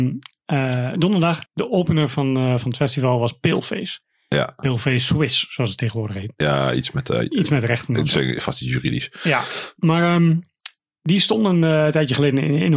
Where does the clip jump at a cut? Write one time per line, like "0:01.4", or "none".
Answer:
0:01.5